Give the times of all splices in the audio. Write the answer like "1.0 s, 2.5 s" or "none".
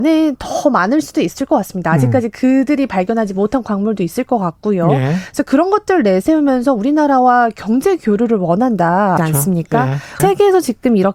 9.2 s, 10.2 s